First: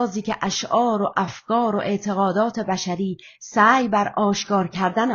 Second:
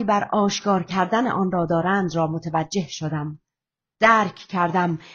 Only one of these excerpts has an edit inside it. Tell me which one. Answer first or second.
second